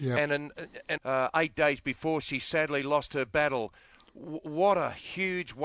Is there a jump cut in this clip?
yes; 1 cut; at 1.0 s

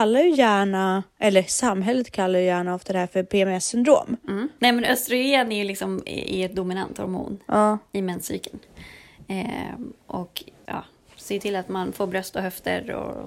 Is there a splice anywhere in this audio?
yes; 2 cuts; at 4.6 s, 10.7 s

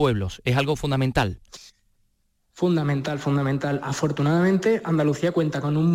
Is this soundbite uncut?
yes; 0 cuts

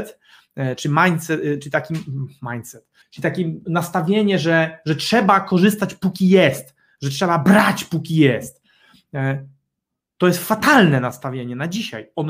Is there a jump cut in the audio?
yes; 1 cut; at 3.0 s

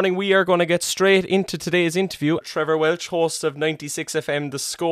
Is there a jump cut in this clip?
yes; 1 cut; at 2.4 s

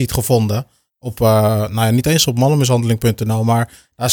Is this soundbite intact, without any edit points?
yes; 0 cuts

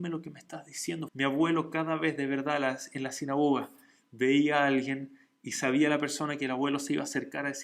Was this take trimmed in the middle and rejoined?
yes; 1 cut; at 1.1 s

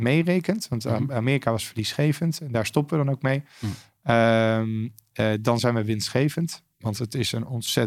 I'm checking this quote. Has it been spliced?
yes; 1 cut; at 6.7 s

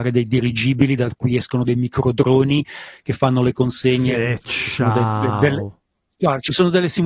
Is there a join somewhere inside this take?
no; 0 cuts

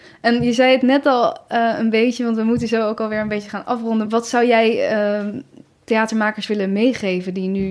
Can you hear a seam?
yes; 1 cut; at 4.0 s

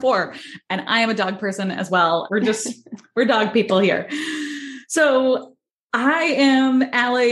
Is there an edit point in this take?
yes; 1 cut; at 2.3 s

